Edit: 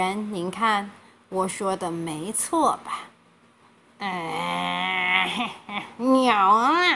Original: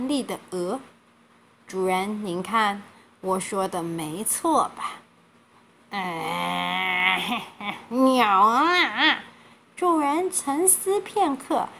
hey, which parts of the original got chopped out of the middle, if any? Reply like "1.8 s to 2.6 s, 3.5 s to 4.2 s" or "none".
none

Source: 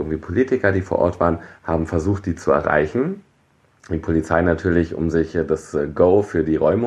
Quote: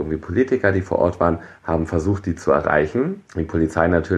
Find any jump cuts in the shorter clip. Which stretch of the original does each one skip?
3.3 s to 3.8 s

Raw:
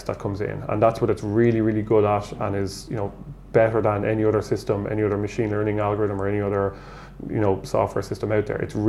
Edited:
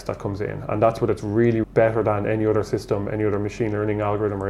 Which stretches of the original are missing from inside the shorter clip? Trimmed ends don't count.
1.6 s to 3.4 s

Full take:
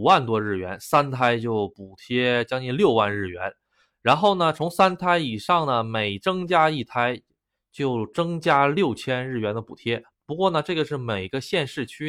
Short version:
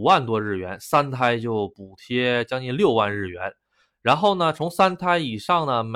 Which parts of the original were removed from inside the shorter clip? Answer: none

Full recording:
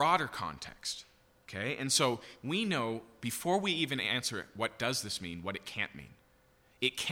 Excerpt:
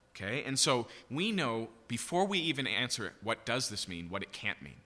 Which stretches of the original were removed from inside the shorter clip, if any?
none

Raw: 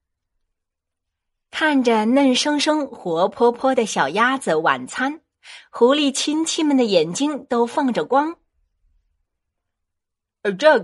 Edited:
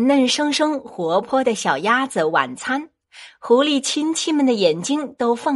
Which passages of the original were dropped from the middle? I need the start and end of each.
3.3 s to 3.5 s

